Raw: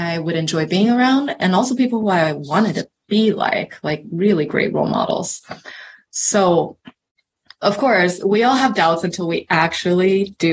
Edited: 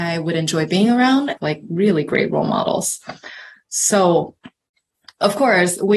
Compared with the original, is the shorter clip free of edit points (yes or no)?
no